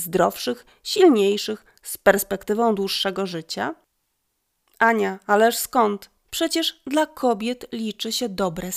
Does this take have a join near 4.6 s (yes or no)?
no